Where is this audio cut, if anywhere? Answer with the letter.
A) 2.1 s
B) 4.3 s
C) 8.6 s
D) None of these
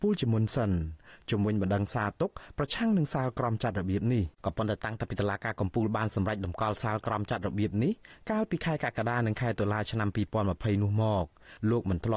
B